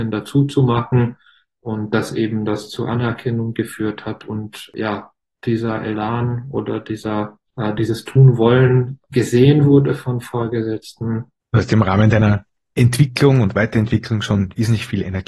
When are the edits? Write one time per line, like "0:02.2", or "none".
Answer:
0:07.5
0:11.4